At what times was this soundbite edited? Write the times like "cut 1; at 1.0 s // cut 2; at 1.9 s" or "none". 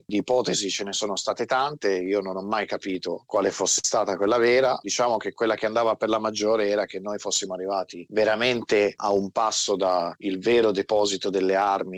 none